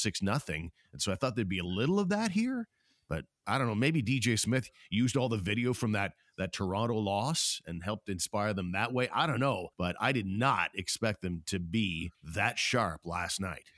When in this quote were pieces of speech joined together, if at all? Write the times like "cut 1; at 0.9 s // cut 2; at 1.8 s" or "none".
cut 1; at 9.7 s // cut 2; at 12.1 s